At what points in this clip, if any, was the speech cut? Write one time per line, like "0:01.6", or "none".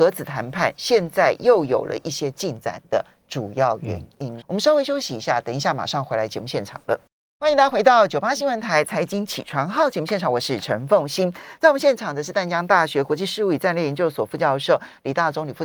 0:04.4

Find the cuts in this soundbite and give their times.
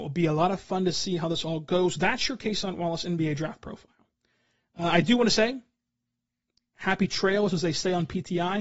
none

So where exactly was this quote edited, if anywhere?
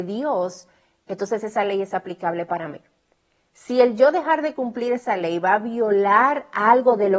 none

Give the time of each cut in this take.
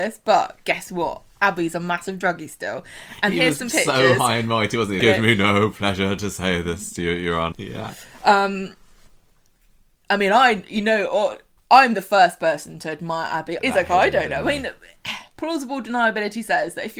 0:05.0
0:07.5
0:13.6

